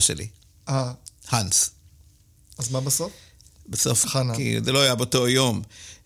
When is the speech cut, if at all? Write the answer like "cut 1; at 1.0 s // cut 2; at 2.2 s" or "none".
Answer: cut 1; at 4.0 s